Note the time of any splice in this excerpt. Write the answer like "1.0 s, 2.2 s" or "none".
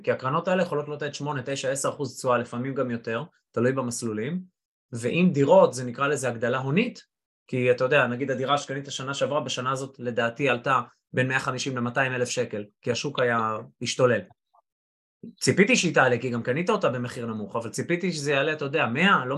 none